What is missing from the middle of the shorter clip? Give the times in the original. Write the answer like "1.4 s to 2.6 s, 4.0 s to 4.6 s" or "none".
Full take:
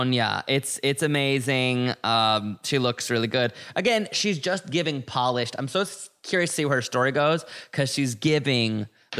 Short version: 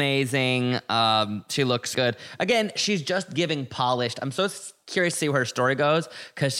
3.1 s to 3.3 s